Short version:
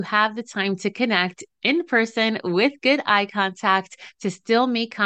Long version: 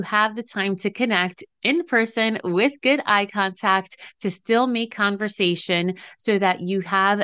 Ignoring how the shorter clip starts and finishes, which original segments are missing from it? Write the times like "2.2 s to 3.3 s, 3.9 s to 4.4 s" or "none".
none